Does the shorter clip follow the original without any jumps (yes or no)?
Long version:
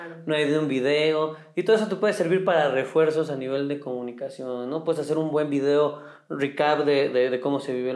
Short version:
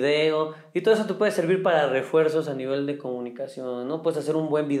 yes